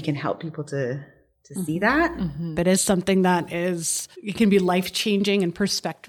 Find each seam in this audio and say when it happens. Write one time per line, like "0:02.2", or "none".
0:02.5
0:04.1